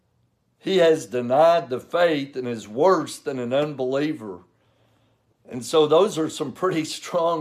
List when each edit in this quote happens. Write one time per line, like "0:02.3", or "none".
none